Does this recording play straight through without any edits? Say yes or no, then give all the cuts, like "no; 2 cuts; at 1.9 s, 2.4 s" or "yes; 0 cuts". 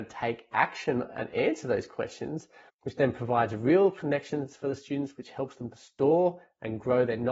no; 1 cut; at 2.7 s